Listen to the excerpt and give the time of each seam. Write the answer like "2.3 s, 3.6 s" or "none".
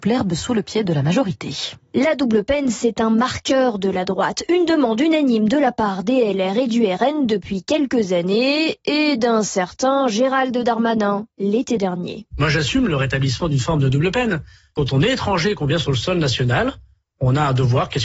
none